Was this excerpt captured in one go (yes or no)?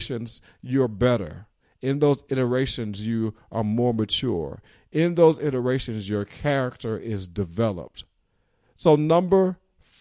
yes